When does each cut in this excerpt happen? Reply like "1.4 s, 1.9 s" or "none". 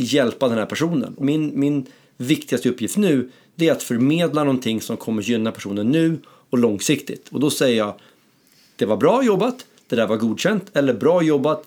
1.2 s